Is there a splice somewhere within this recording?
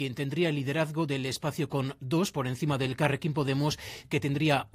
no; 0 cuts

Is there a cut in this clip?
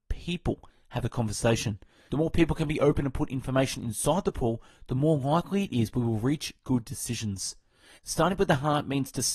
yes; 2 cuts; at 2.1 s, 8.0 s

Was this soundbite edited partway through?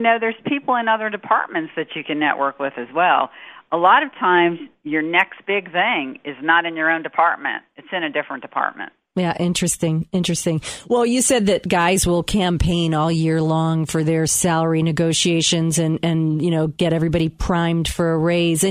no; 0 cuts

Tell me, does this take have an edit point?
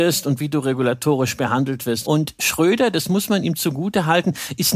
yes; 1 cut; at 2.0 s

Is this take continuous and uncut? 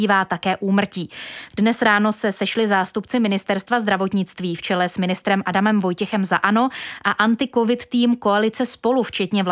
no; 1 cut; at 1.5 s

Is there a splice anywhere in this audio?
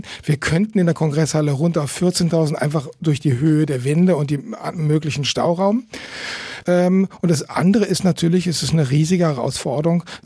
yes; 1 cut; at 6.6 s

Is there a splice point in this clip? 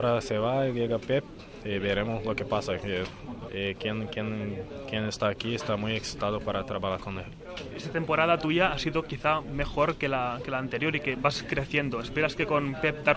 yes; 1 cut; at 3.5 s

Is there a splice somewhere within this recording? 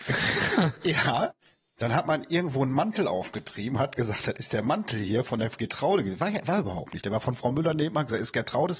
no; 0 cuts

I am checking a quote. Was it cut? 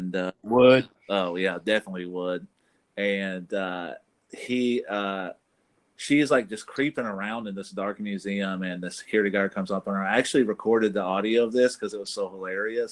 no; 0 cuts

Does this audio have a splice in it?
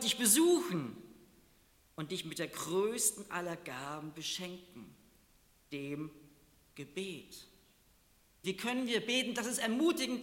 yes; 1 cut; at 8.4 s

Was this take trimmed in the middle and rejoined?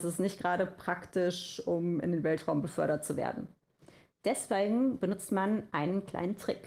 no; 0 cuts

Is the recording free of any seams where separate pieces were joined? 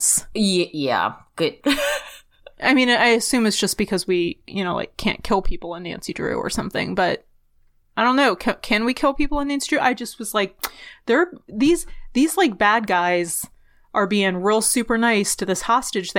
no; 1 cut; at 1.6 s

